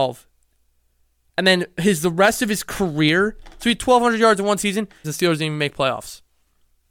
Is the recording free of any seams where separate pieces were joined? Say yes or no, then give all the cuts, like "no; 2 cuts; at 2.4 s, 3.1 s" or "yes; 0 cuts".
no; 2 cuts; at 1.2 s, 5.0 s